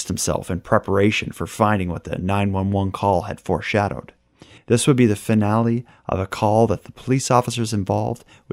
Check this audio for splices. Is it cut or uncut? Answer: cut